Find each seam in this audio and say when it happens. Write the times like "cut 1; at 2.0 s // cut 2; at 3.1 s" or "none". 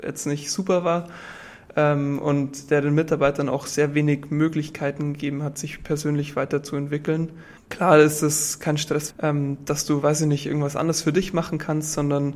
cut 1; at 9.1 s